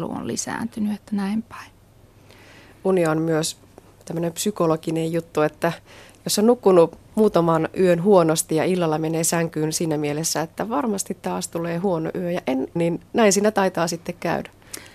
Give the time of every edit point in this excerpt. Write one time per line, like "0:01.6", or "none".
0:12.8